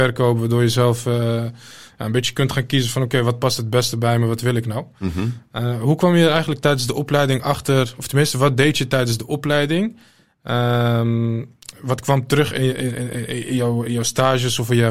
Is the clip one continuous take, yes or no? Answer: yes